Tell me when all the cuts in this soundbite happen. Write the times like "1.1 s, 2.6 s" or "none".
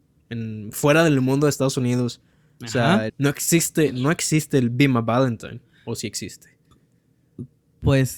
3.1 s